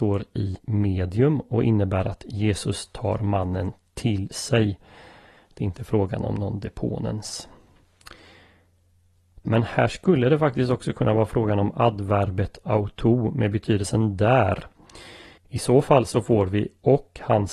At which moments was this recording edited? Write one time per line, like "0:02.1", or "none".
0:09.4
0:15.4